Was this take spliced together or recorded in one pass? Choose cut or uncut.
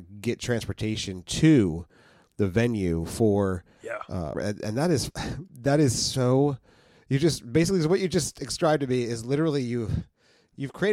cut